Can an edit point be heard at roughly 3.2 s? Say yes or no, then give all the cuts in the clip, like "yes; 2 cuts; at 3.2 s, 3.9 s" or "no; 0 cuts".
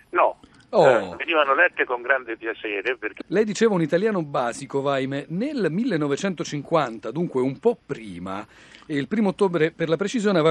yes; 1 cut; at 3.2 s